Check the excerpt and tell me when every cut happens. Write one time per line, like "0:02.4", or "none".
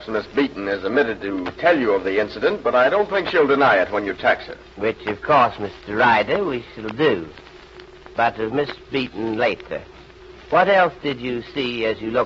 0:10.4